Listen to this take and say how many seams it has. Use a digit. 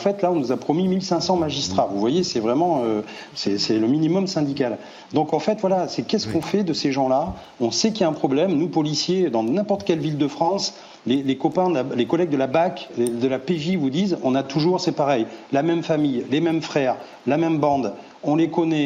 0